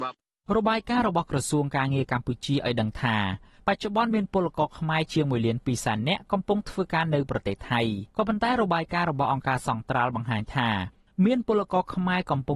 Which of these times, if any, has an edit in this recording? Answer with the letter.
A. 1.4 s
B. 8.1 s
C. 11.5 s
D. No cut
B